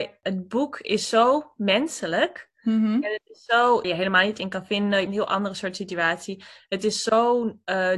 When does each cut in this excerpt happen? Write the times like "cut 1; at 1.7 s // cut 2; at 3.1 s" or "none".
cut 1; at 3.8 s // cut 2; at 5.1 s